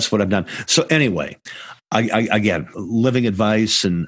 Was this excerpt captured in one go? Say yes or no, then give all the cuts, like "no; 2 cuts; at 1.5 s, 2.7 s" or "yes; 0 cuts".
no; 1 cut; at 2.7 s